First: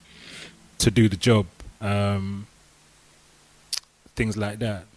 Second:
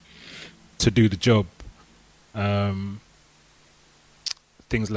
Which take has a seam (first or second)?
first